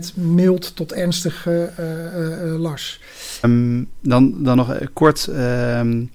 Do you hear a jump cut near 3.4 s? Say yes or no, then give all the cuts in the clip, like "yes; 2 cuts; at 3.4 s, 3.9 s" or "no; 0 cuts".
yes; 1 cut; at 3.4 s